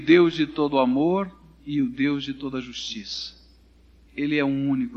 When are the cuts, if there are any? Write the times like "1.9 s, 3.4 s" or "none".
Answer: none